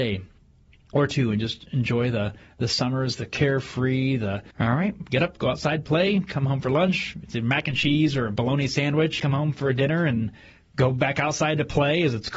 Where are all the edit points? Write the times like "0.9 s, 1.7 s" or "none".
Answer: 4.5 s, 9.2 s